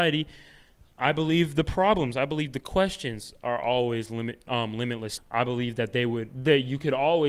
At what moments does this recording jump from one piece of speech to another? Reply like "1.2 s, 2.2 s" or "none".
5.2 s

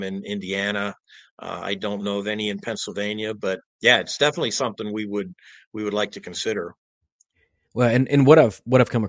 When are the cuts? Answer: none

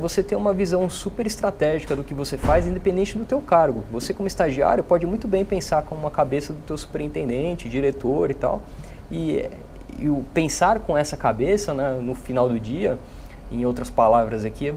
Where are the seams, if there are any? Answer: none

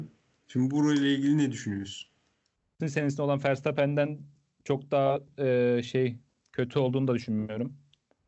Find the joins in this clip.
2.8 s

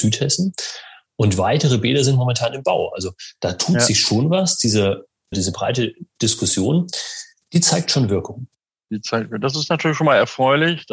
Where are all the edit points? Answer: 5.3 s

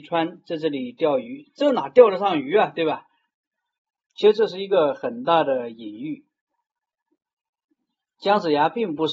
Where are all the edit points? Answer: 3.3 s

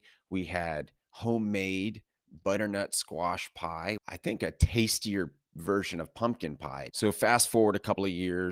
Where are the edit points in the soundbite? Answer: 4.0 s, 6.9 s

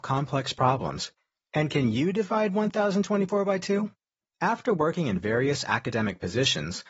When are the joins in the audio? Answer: 4.2 s

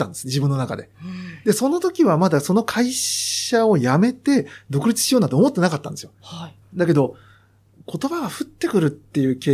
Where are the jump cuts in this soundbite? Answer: 6.6 s

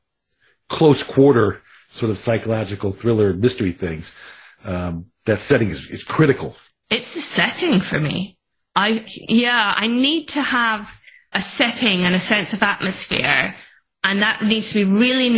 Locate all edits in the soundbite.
6.8 s, 9.1 s, 11.3 s

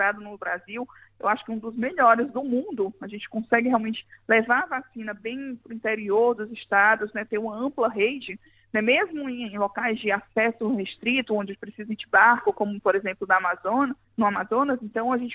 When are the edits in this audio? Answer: 14.0 s

